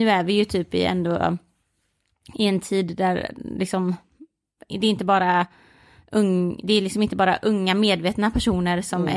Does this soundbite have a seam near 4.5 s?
no; 0 cuts

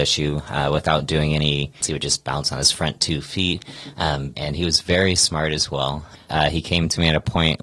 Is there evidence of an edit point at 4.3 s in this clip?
yes; 3 cuts; at 1.8 s, 4.3 s, 6.3 s

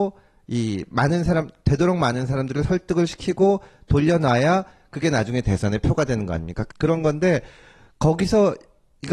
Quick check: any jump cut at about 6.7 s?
yes; 1 cut; at 6.7 s

